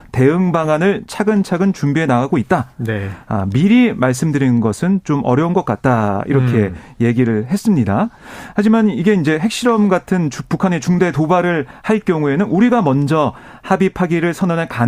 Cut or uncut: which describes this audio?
uncut